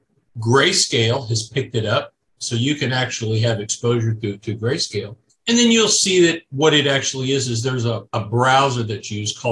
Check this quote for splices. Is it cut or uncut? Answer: cut